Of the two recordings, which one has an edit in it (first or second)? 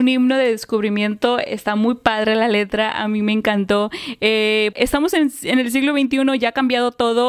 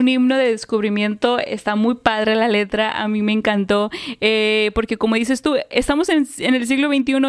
first